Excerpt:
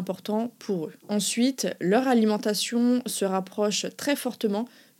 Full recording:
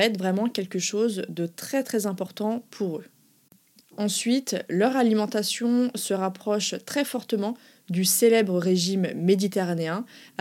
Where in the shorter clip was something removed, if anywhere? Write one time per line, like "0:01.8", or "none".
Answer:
0:01.0